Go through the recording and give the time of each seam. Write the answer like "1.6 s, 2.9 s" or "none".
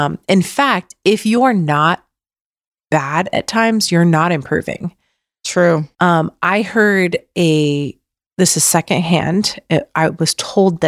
none